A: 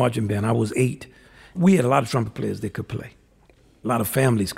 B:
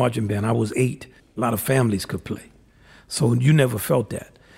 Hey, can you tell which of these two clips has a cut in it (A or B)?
B